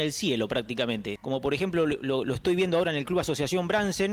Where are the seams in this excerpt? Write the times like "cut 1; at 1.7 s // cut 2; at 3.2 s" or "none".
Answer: cut 1; at 1.2 s